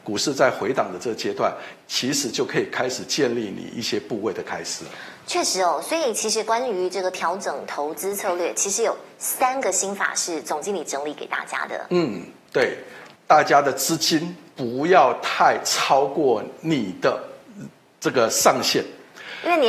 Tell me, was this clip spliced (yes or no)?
yes